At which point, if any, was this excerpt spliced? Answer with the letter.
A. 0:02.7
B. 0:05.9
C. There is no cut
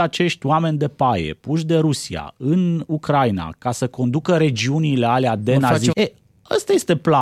B